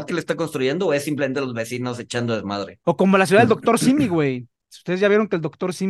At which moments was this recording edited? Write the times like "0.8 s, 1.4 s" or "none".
2.8 s